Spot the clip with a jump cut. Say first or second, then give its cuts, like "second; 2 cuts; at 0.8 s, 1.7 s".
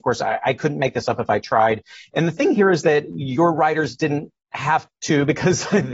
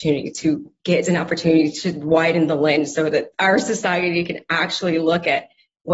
second; 1 cut; at 3.3 s